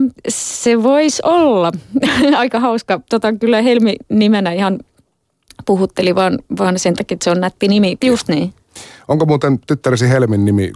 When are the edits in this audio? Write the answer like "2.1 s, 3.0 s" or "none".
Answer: 8.0 s

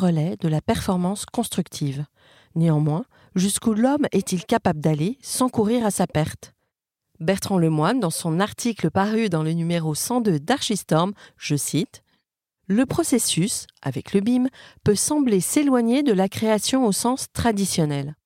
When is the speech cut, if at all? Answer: none

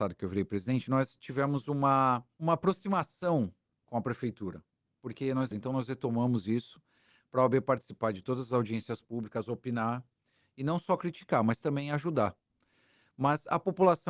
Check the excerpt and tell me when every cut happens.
2.3 s, 5.5 s

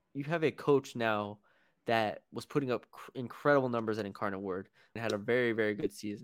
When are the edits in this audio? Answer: 5.0 s

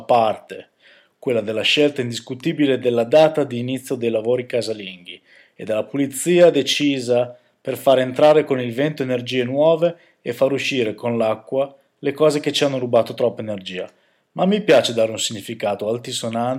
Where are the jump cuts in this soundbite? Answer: none

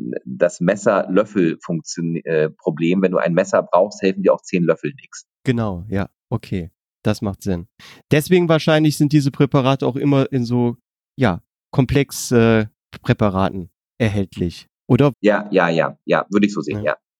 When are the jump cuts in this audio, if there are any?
15.1 s

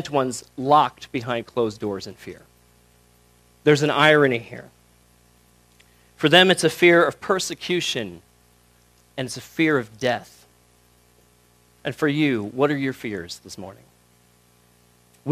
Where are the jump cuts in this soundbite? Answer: none

